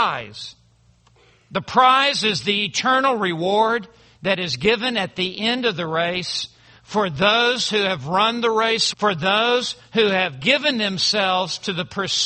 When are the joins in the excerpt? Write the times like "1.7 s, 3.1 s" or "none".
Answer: 8.9 s

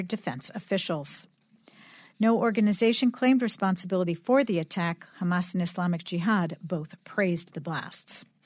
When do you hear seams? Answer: none

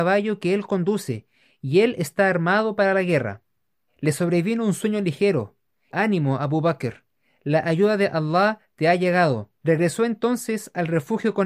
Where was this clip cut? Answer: 3.9 s, 5.9 s, 9.6 s

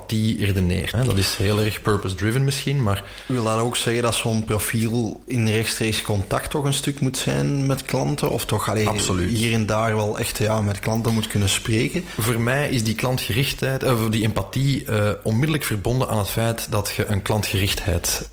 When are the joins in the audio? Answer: 0.9 s

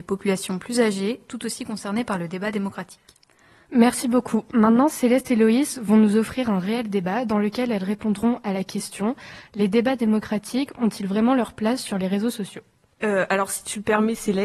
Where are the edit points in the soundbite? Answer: 3.7 s

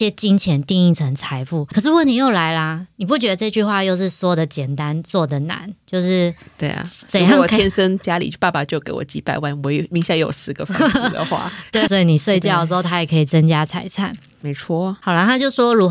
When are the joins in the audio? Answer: 11.9 s

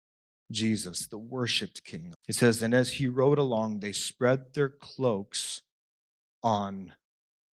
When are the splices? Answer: 2.1 s

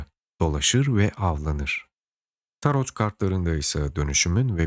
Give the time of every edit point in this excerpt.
2.4 s

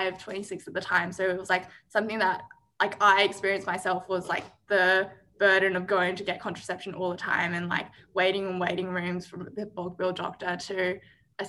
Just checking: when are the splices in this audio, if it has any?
none

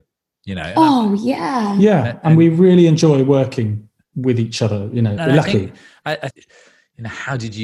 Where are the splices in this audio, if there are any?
5.2 s, 6.3 s

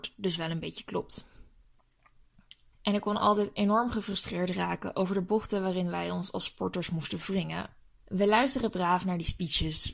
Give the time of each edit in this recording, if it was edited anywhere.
2.7 s, 7.9 s

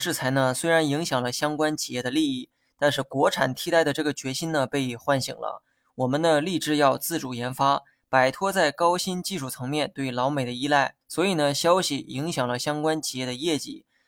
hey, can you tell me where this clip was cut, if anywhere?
11.0 s

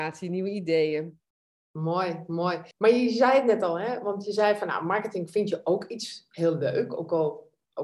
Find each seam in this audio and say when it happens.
2.7 s

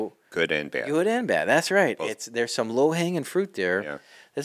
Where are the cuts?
none

